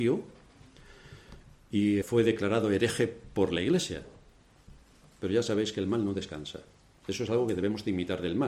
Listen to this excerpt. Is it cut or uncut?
cut